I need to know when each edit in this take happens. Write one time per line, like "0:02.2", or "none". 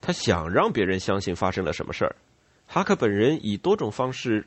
0:02.6